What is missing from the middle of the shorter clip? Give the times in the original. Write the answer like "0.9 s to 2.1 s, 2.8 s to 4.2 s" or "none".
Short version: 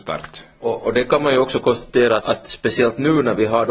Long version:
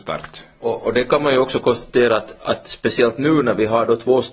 2.2 s to 2.4 s